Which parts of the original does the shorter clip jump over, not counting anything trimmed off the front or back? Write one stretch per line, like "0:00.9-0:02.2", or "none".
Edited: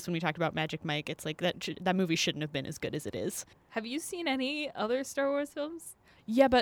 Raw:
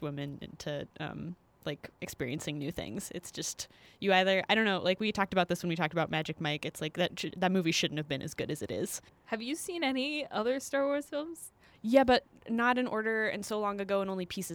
none